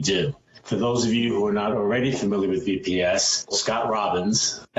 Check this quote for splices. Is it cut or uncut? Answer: cut